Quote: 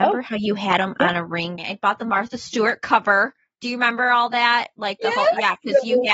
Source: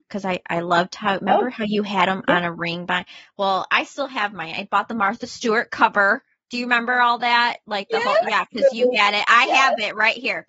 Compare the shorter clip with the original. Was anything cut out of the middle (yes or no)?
yes